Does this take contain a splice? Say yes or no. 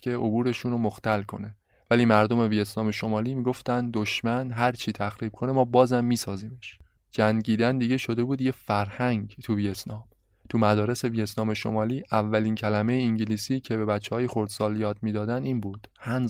no